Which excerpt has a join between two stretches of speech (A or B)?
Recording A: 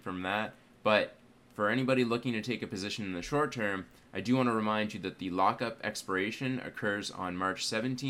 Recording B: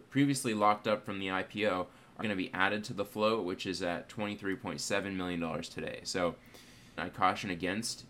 B